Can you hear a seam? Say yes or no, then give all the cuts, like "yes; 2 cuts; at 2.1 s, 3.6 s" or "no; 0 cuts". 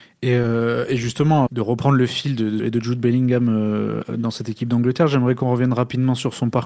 yes; 2 cuts; at 1.5 s, 2.6 s